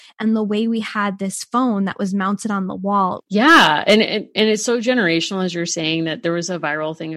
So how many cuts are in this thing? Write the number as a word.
one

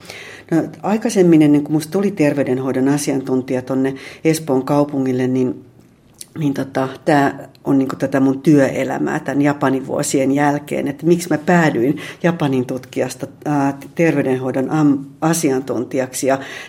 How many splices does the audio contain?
zero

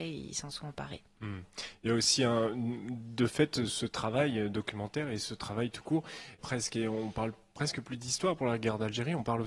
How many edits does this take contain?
two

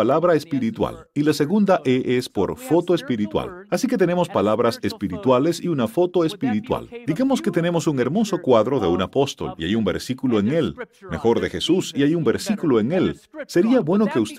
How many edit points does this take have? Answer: two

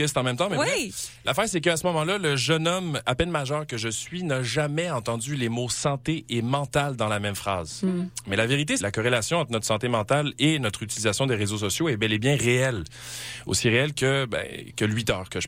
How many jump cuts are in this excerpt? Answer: two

